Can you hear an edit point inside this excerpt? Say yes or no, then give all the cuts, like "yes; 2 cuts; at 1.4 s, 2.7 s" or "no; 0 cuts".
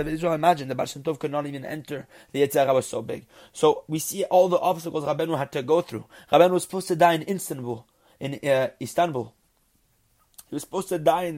no; 0 cuts